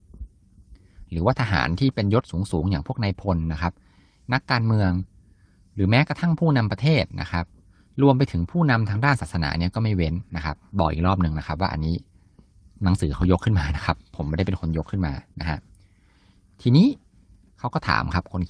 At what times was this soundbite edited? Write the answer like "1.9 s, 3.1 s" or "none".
none